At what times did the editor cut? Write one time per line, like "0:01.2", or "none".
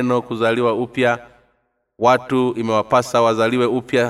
none